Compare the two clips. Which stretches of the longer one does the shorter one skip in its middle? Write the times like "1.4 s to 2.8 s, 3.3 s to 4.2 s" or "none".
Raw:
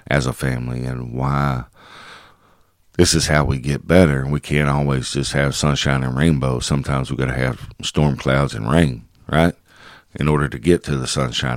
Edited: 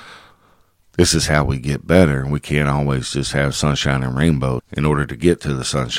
6.6 s to 10.0 s